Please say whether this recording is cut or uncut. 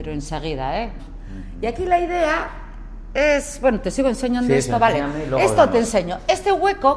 cut